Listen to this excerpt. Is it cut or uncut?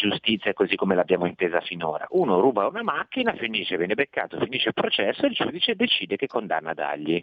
cut